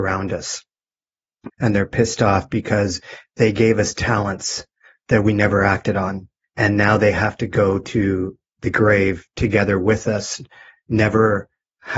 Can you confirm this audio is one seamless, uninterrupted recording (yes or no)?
no